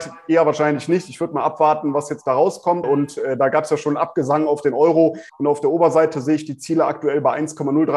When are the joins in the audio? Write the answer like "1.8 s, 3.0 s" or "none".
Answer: 2.8 s, 5.3 s